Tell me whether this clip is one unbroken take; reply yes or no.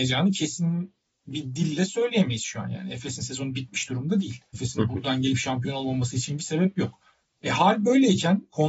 no